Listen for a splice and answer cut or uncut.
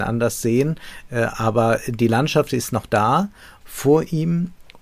cut